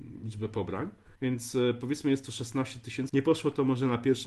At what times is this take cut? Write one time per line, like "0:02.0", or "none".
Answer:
0:01.2
0:03.1